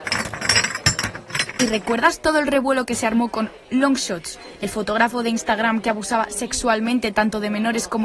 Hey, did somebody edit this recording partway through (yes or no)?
no